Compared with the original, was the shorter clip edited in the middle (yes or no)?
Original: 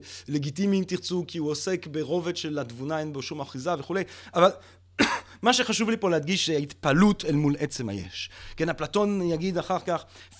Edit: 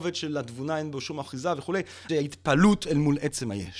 yes